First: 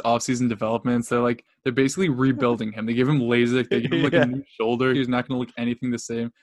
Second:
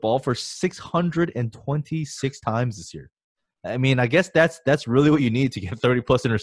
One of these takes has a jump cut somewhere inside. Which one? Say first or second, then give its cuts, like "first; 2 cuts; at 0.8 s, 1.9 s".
first; 1 cut; at 4.9 s